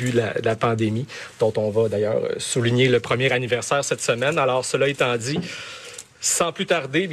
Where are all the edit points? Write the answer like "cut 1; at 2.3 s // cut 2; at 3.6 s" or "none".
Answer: none